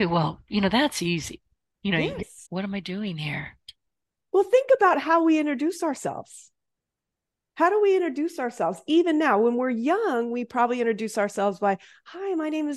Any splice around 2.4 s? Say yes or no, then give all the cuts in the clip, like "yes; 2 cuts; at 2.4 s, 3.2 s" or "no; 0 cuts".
yes; 1 cut; at 2.4 s